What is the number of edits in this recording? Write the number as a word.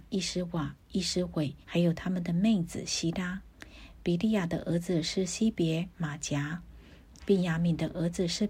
two